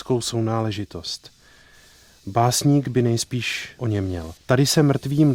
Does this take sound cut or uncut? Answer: cut